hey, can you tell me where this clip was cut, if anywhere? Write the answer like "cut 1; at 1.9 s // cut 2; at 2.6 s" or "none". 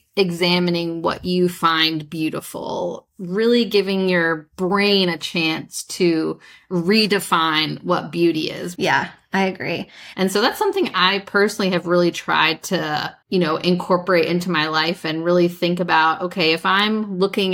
cut 1; at 8.8 s // cut 2; at 10.1 s // cut 3; at 13.2 s